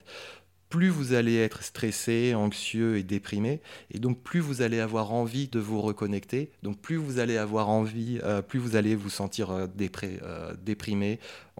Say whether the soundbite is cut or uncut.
uncut